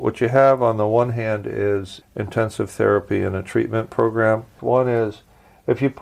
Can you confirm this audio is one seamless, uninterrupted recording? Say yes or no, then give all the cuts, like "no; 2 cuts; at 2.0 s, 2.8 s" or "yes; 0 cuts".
no; 2 cuts; at 2.0 s, 4.6 s